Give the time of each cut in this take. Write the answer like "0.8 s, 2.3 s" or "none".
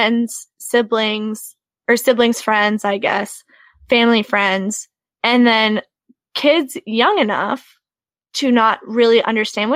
none